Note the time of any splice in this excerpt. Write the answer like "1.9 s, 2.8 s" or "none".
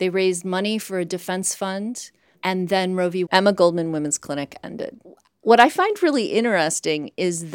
3.3 s